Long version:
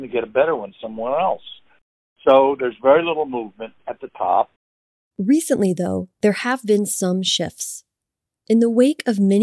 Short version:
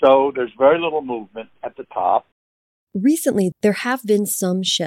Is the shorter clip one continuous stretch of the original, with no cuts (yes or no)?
no